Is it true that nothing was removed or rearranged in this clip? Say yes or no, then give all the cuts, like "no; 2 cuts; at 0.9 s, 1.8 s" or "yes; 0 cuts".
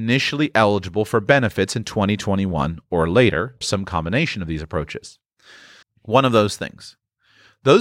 no; 2 cuts; at 3.6 s, 5.8 s